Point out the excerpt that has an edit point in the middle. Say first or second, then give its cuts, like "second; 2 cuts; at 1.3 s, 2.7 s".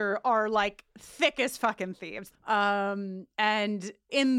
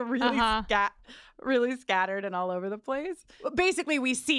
first; 1 cut; at 2.3 s